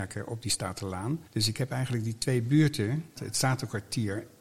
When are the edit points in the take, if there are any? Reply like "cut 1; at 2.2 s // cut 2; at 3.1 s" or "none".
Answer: cut 1; at 1.3 s // cut 2; at 3.2 s